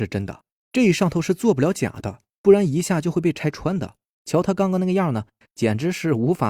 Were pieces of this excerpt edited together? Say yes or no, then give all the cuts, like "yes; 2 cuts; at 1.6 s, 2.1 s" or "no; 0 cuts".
yes; 1 cut; at 4.2 s